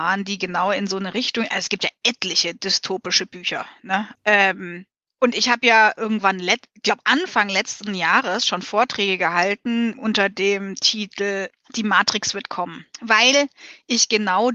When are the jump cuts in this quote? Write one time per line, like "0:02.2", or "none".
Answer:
0:04.1
0:12.9